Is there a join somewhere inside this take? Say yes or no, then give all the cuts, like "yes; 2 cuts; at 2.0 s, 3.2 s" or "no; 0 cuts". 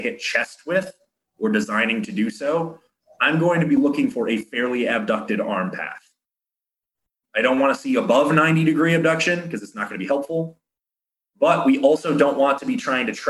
no; 0 cuts